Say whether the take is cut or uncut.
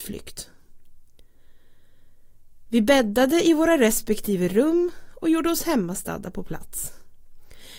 uncut